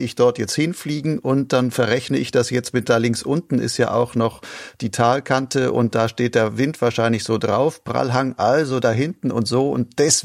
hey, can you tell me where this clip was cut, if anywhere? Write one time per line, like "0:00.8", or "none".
none